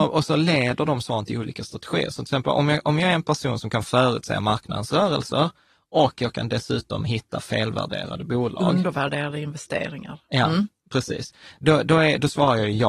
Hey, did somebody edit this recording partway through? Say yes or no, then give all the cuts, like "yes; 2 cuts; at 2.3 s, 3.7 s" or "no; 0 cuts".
no; 0 cuts